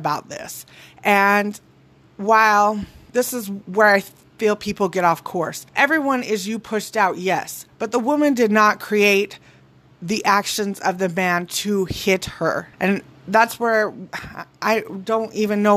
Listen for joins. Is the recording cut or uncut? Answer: cut